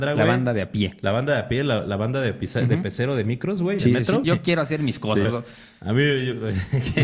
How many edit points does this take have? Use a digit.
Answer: 2